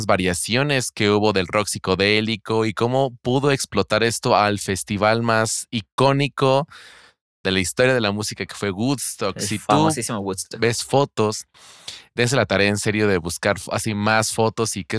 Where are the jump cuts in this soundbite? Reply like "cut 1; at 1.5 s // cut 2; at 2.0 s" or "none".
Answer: none